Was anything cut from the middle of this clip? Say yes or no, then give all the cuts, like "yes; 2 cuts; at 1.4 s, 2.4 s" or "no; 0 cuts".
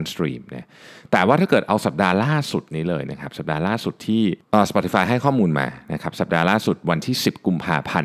yes; 1 cut; at 4.4 s